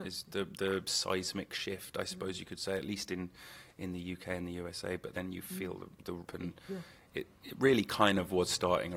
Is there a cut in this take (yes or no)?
yes